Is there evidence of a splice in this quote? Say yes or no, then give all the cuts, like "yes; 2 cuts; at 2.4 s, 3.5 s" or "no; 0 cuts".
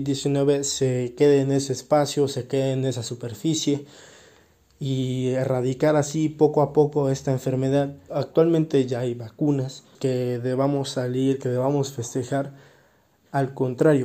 yes; 2 cuts; at 8.1 s, 9.9 s